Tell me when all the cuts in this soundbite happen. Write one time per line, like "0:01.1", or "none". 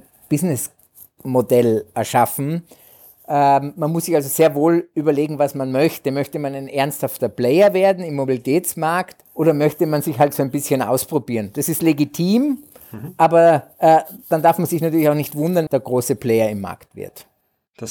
0:09.2
0:15.7